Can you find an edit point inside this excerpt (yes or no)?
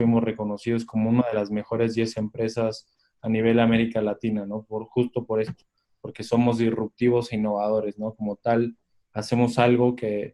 no